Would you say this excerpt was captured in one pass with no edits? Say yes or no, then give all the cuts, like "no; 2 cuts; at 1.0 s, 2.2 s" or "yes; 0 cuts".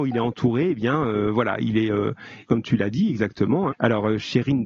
no; 2 cuts; at 2.5 s, 3.7 s